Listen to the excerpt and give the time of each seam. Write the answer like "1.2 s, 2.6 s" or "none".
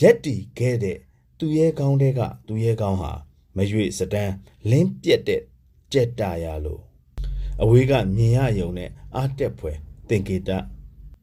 none